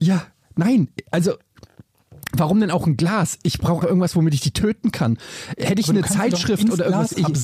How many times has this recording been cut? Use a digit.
1